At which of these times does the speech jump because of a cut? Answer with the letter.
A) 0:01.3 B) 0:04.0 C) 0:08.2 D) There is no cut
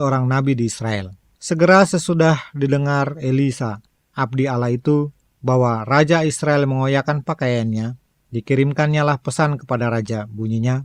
A